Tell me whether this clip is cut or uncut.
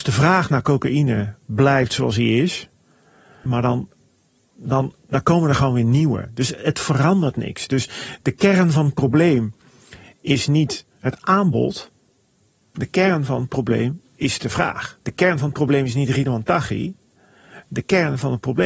cut